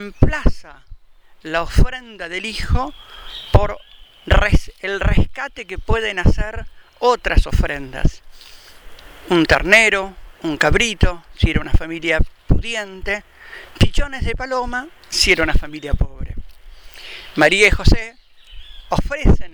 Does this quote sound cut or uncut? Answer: uncut